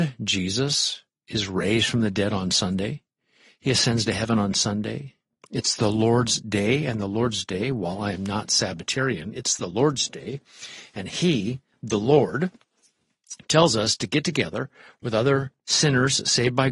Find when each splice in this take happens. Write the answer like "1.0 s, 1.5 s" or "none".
15.6 s